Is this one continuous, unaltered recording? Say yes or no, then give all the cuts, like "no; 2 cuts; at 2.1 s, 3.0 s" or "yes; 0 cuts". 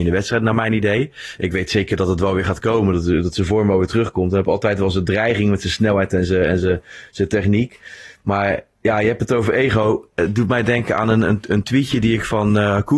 yes; 0 cuts